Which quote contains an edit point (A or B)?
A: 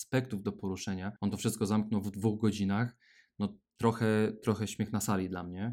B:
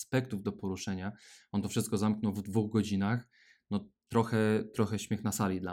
A